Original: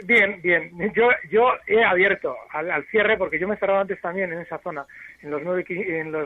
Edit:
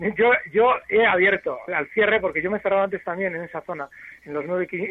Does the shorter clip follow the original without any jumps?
no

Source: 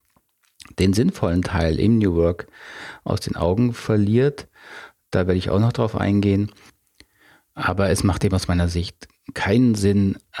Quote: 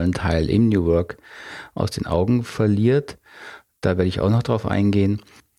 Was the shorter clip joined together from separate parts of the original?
no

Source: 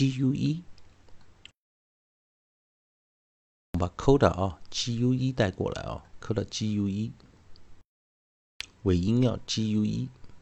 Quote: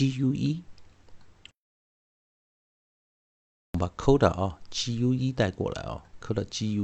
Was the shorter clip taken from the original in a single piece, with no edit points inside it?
yes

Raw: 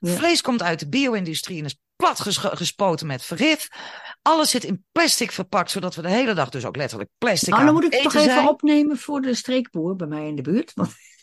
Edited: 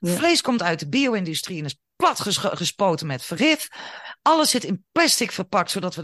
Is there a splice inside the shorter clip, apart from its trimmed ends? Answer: no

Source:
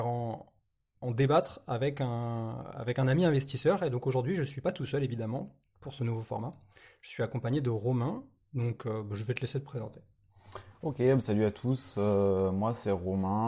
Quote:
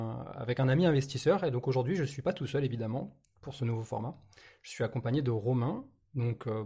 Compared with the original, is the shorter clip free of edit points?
yes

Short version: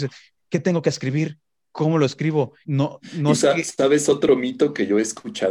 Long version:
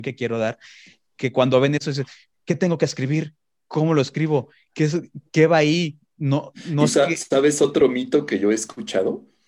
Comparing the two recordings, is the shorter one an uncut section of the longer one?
no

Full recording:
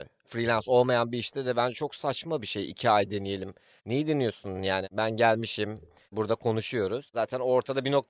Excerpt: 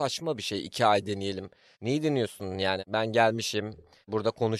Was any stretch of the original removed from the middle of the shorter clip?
no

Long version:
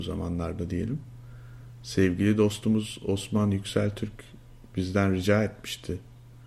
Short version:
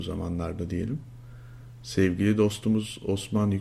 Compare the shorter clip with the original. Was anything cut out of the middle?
no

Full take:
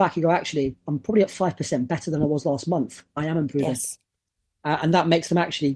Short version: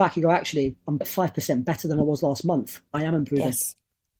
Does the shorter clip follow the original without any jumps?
no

